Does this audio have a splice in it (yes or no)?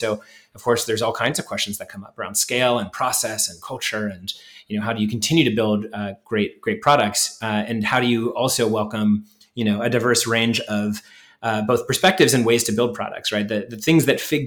no